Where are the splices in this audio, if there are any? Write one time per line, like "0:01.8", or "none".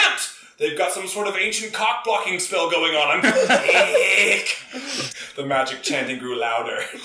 0:03.2
0:05.1

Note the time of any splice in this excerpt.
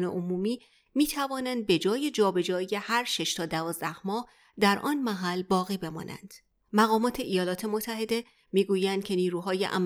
0:06.6

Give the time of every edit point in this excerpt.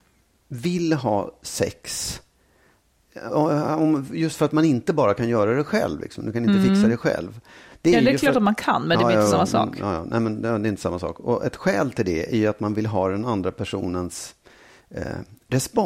0:03.3

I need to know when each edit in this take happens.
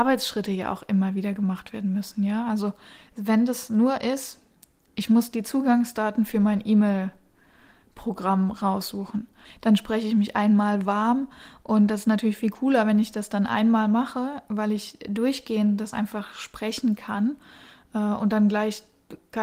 0:09.4

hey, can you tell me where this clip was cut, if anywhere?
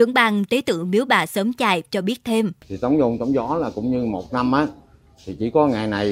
0:02.6

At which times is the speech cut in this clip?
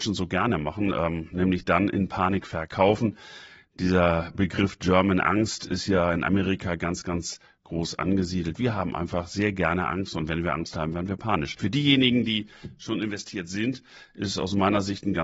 0:11.6

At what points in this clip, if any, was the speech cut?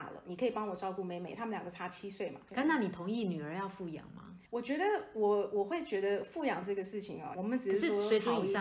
0:02.5
0:04.5
0:07.3

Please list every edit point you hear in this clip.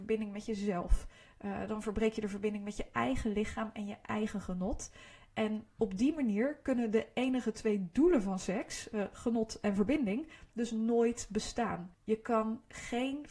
0:11.9

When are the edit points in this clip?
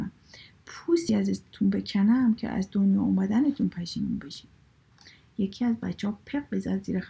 none

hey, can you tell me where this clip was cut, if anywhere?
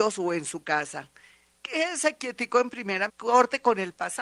0:01.6
0:03.1

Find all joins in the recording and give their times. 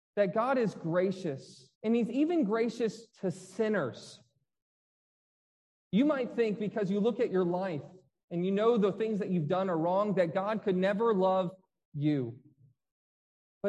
0:01.7
0:03.1

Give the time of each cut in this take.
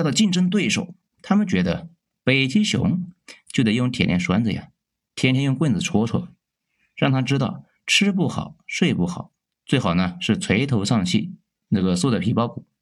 0:01.1

